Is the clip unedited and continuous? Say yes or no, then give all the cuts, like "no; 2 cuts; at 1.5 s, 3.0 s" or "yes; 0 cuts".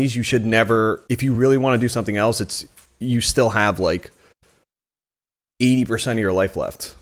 yes; 0 cuts